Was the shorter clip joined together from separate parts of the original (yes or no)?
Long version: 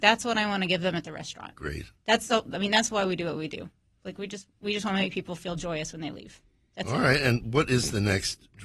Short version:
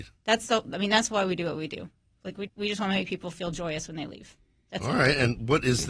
yes